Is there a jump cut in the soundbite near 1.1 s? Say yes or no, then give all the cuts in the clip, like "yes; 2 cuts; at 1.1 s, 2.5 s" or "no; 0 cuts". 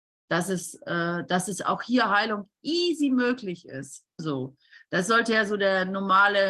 no; 1 cut; at 4.2 s